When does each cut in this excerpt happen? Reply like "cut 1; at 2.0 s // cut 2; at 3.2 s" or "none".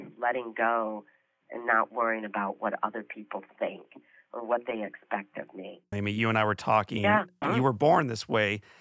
cut 1; at 5.9 s // cut 2; at 7.4 s